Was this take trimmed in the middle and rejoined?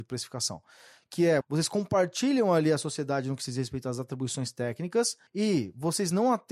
yes; 2 cuts; at 1.4 s, 5.3 s

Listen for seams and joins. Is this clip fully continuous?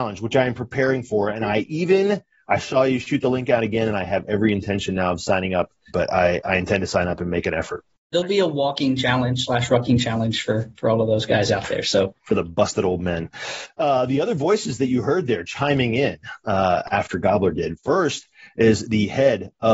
no; 2 cuts; at 5.9 s, 8.1 s

